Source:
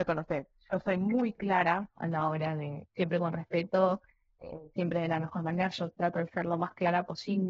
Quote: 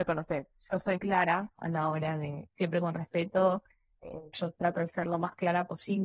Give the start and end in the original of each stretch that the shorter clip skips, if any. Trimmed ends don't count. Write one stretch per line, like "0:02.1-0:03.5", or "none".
0:01.0-0:01.3
0:04.7-0:05.7